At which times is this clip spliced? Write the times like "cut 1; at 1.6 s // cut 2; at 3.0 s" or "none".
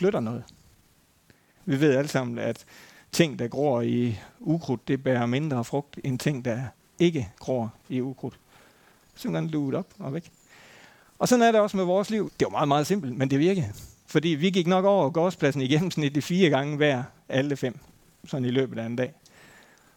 cut 1; at 1.6 s // cut 2; at 9.0 s // cut 3; at 12.3 s